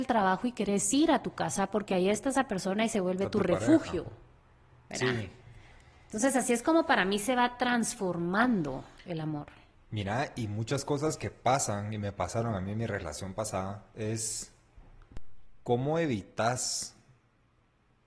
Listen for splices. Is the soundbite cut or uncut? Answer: uncut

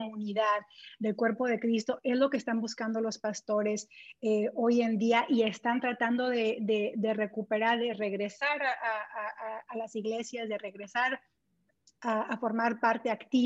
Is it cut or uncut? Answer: uncut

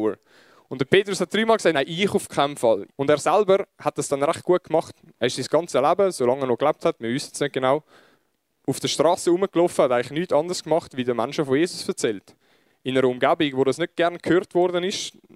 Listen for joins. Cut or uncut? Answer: cut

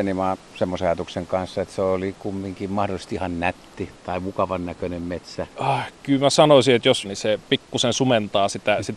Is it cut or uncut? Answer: cut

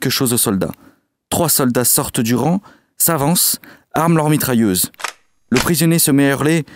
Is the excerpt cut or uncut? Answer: uncut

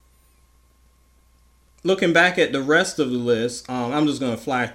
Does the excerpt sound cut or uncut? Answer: uncut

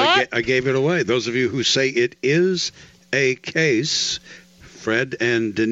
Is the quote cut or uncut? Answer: uncut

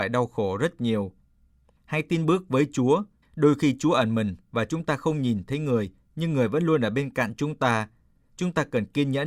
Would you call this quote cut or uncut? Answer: uncut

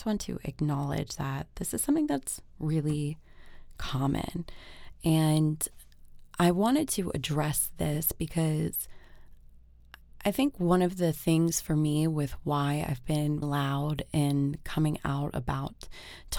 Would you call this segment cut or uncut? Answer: cut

